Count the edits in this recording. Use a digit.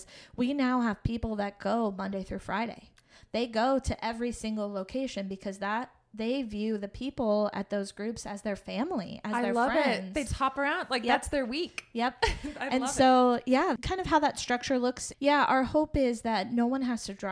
3